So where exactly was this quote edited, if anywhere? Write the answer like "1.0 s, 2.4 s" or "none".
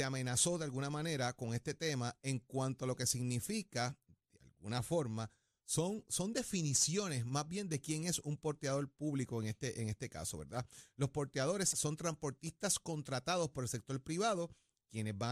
11.7 s